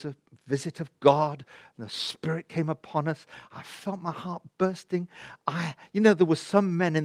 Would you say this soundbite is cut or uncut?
uncut